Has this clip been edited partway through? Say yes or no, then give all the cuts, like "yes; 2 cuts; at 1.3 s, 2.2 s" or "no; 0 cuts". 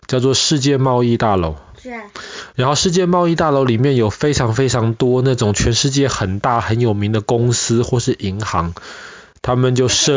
no; 0 cuts